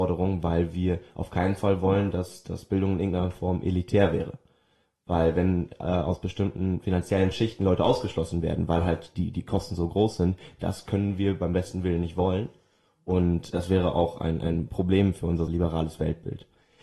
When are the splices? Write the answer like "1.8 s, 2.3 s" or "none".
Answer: 13.5 s, 15.5 s